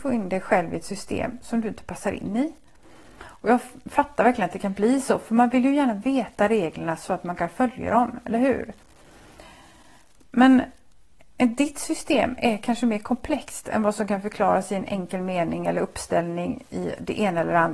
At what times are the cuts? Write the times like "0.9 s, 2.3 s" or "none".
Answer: none